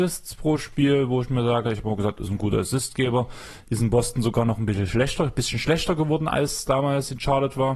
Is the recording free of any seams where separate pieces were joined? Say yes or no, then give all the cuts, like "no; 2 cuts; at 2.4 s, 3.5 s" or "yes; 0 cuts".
yes; 0 cuts